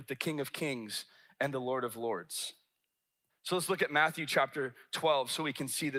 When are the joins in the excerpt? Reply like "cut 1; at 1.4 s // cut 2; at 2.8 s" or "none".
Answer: cut 1; at 3.3 s

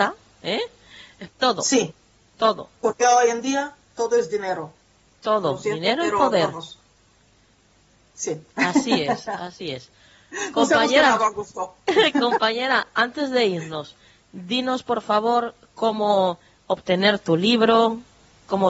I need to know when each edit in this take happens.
cut 1; at 1.3 s

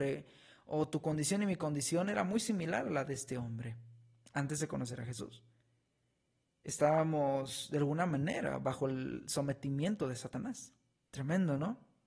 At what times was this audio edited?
cut 1; at 11.1 s

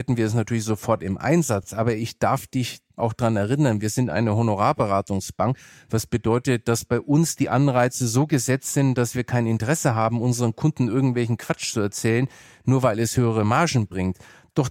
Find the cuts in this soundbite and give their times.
none

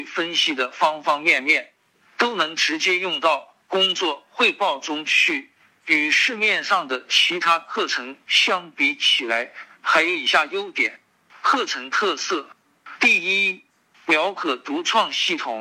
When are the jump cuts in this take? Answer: cut 1; at 5.7 s

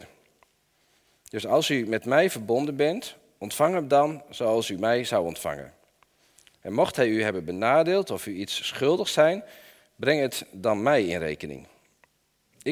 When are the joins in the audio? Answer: none

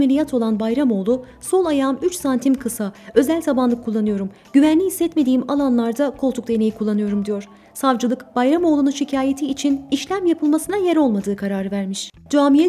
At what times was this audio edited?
none

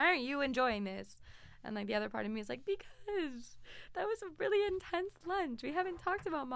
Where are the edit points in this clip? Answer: none

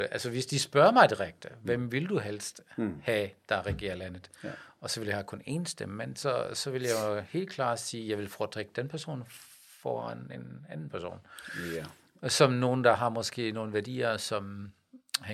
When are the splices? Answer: none

